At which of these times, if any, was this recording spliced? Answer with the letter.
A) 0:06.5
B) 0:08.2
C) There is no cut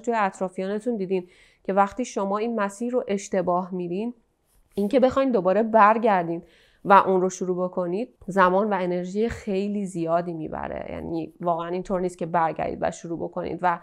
B